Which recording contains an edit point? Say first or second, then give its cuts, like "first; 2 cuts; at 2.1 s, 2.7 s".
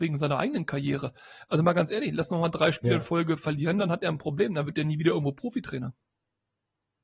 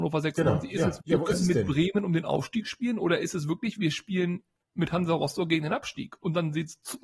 second; 1 cut; at 1.0 s